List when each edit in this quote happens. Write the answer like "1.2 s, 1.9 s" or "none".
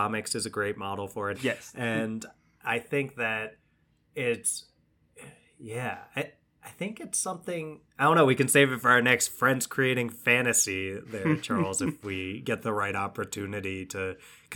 1.3 s